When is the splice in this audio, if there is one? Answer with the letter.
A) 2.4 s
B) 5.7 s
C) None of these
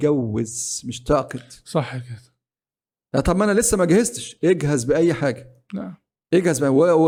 C